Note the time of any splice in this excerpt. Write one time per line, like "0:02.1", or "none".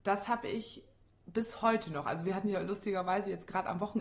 none